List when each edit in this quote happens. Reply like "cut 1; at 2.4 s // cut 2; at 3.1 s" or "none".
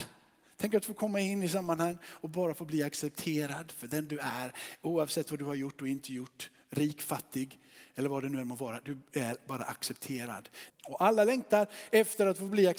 cut 1; at 10.7 s